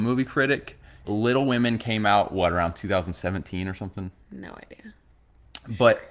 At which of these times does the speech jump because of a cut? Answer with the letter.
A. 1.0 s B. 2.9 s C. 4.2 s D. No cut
A